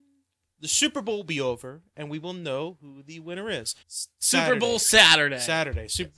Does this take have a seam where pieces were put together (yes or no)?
yes